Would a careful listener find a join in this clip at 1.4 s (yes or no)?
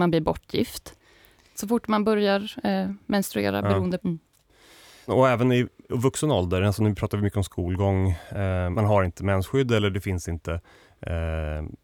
no